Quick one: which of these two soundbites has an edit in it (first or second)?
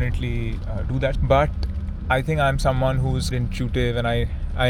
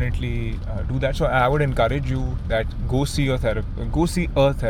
first